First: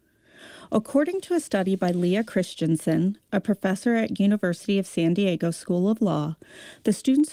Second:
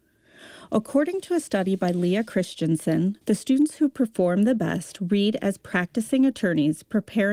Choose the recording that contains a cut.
second; 1 cut; at 3.2 s

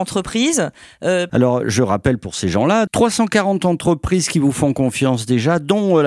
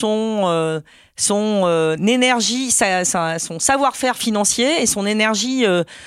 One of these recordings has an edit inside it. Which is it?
first; 2 cuts; at 1.3 s, 2.9 s

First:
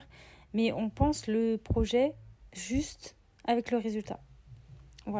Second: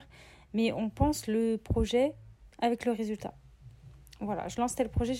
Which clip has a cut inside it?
second; 1 cut; at 2.5 s

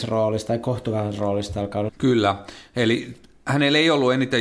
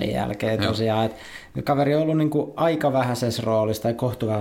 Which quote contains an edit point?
first; 1 cut; at 1.9 s

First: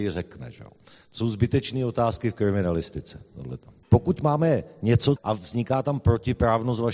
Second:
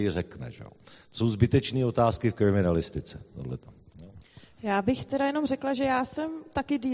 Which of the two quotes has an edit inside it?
first; 2 cuts; at 3.8 s, 5.2 s

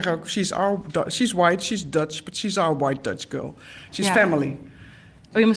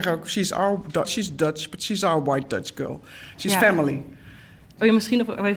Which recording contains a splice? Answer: second; 1 cut; at 1.0 s

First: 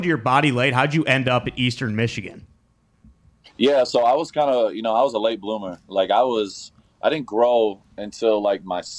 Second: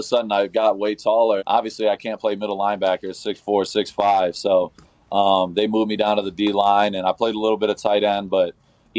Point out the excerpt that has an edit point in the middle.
second; 1 cut; at 1.4 s

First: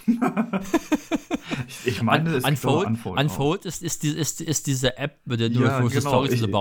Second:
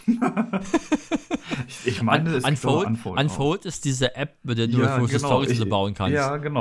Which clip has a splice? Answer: second; 1 cut; at 3.8 s

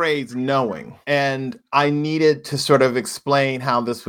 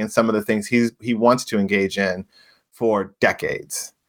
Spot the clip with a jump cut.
first; 1 cut; at 1.0 s

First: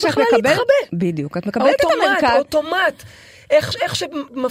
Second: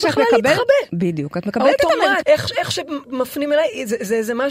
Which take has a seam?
second; 1 cut; at 2.2 s

